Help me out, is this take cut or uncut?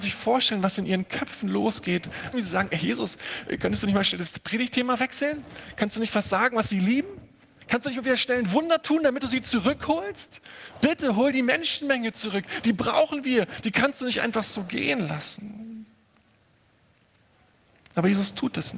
cut